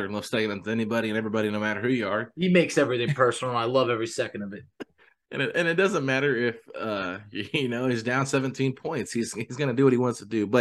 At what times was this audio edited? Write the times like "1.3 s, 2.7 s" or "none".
none